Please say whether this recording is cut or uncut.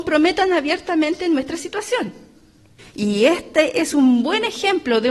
cut